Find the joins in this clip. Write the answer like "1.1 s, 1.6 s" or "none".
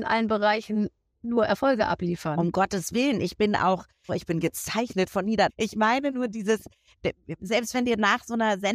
4.1 s, 5.5 s, 7.4 s